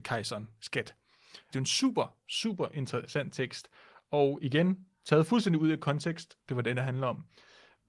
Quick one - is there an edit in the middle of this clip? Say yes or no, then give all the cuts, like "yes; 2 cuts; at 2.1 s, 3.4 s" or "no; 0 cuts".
yes; 2 cuts; at 1.5 s, 6.4 s